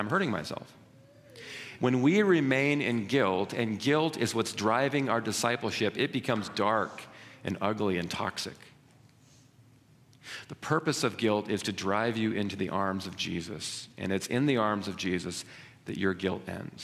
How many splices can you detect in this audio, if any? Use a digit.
1